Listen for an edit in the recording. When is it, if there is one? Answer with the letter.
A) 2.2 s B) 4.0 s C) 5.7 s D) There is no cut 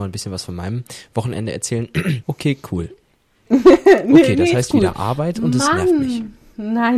A